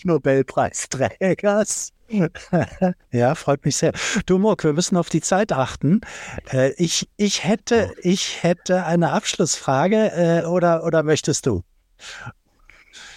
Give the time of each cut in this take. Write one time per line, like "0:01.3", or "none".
0:03.1